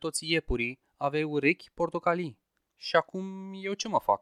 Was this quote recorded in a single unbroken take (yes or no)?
no